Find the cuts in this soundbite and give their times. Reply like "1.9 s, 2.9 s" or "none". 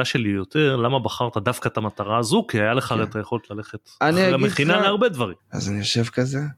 5.4 s